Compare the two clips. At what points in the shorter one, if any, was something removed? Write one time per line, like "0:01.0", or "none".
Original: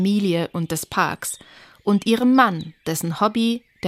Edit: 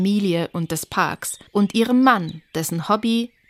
0:01.5